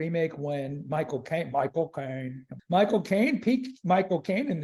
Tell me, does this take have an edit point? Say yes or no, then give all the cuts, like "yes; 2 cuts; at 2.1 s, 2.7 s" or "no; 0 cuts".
yes; 1 cut; at 2.6 s